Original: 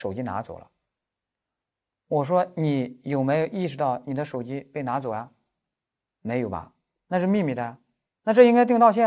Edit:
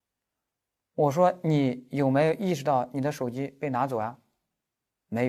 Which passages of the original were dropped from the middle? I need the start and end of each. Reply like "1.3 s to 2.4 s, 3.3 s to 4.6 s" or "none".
none